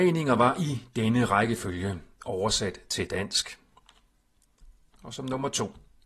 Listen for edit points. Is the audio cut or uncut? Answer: cut